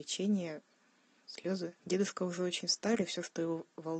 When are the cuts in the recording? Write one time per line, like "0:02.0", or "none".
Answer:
0:01.8